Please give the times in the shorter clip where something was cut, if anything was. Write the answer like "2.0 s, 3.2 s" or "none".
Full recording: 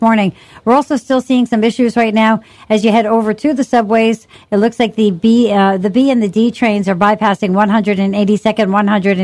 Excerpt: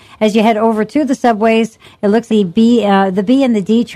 2.3 s